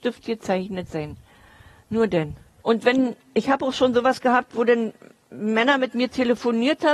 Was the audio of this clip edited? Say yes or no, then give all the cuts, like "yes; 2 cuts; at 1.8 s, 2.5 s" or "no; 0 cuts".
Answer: yes; 1 cut; at 2.6 s